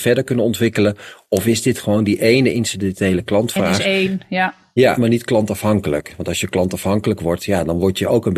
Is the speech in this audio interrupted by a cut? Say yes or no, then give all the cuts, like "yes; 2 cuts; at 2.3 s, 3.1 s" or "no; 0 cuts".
yes; 1 cut; at 5.0 s